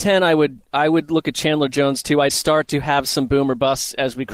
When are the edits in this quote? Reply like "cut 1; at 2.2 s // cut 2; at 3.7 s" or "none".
cut 1; at 2.3 s